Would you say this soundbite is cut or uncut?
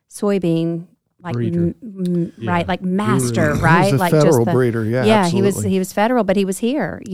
uncut